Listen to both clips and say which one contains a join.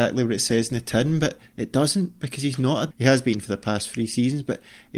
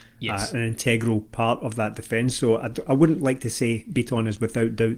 first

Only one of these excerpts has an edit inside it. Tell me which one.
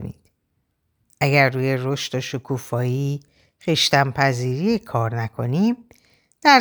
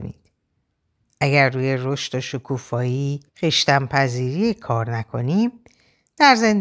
second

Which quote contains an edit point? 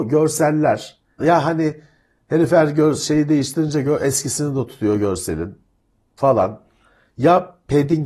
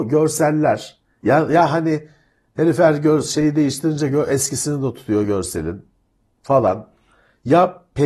first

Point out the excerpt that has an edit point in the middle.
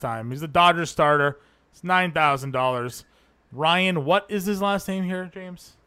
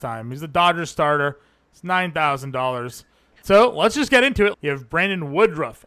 second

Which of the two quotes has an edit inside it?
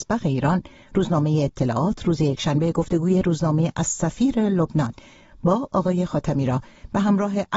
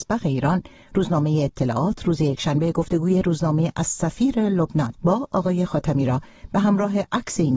second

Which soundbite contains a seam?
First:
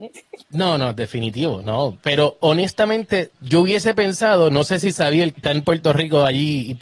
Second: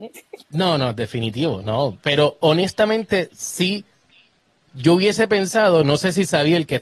first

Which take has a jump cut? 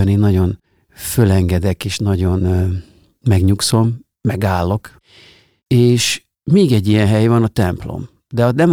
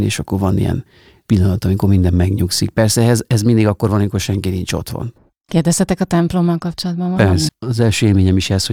second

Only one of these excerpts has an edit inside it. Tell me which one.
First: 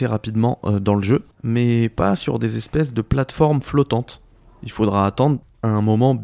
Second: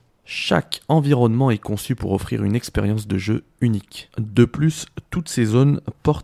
first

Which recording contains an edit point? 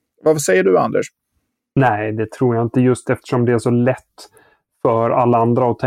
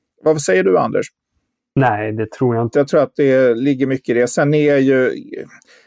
second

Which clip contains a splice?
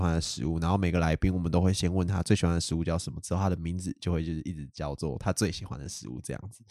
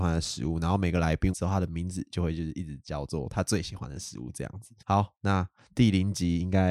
second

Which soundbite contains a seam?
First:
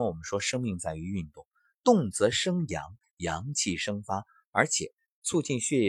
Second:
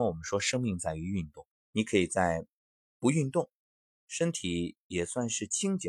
second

